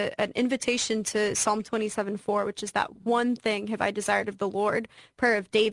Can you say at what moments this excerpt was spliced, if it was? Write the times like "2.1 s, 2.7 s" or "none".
none